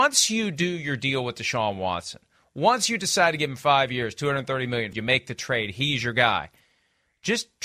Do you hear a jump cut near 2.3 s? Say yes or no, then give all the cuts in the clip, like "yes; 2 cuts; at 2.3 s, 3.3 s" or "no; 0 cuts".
no; 1 cut; at 4.9 s